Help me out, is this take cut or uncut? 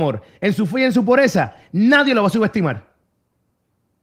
uncut